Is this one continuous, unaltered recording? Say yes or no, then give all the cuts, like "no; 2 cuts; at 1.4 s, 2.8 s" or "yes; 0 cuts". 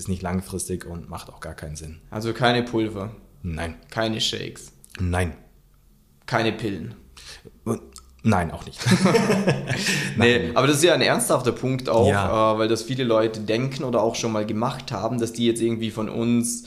yes; 0 cuts